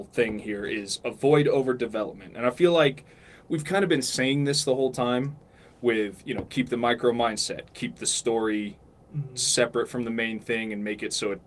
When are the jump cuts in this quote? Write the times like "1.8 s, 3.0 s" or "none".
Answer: none